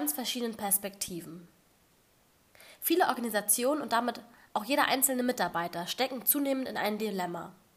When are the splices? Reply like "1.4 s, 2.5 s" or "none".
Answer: none